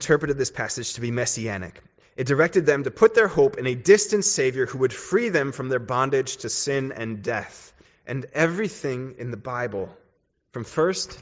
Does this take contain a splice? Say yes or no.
no